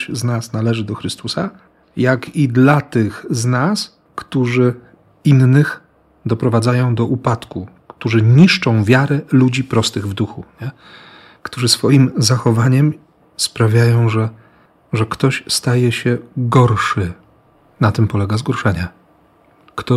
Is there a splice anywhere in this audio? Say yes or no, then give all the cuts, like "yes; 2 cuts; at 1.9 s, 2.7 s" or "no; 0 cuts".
yes; 1 cut; at 4.1 s